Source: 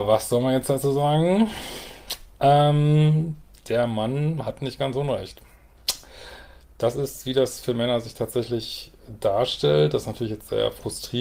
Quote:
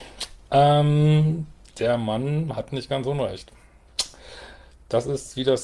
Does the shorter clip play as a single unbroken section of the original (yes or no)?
yes